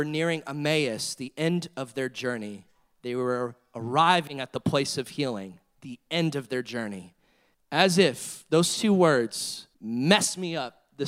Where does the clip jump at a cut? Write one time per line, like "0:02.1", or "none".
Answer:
0:07.5
0:09.7